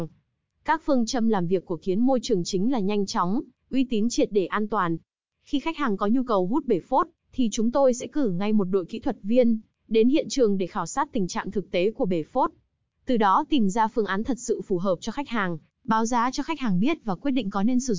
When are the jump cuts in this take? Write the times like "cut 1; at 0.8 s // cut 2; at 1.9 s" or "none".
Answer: cut 1; at 5.3 s